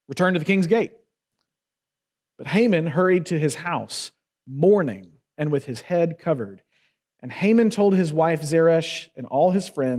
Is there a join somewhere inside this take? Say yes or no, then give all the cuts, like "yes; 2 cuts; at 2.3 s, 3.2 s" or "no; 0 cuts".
no; 0 cuts